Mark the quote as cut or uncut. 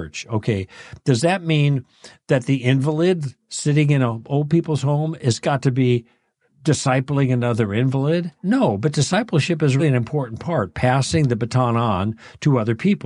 cut